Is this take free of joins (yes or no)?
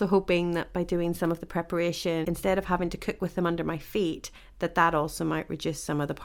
no